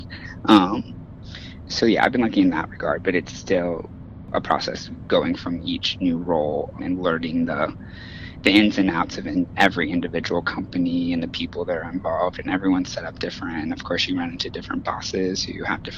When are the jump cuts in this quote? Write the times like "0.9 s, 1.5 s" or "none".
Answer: 1.7 s, 4.3 s, 6.8 s